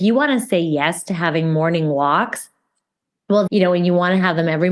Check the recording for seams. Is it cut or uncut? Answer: cut